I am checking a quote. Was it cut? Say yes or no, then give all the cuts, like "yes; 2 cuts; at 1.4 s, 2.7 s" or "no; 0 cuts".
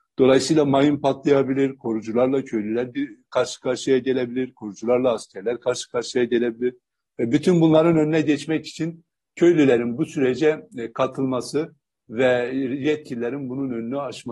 no; 0 cuts